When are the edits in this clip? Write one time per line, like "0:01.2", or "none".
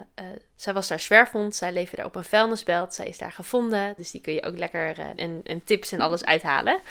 0:04.0
0:05.2

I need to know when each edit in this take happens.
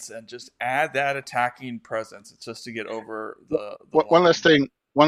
none

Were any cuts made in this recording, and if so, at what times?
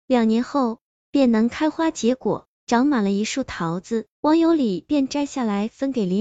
0:04.1

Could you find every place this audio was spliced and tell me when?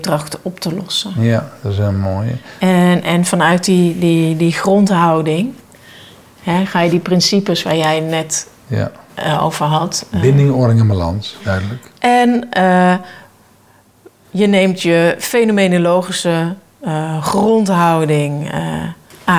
0:11.4

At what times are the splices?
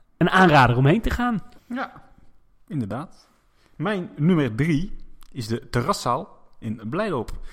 0:01.6

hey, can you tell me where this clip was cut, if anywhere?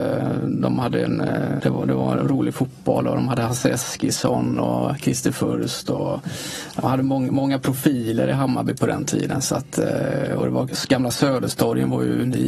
0:01.6

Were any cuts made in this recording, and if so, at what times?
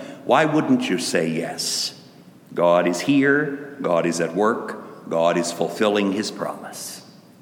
0:02.4

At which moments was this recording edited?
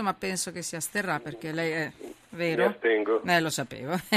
none

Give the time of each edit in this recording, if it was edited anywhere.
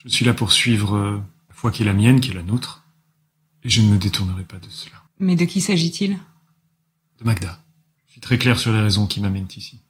0:05.1
0:08.0

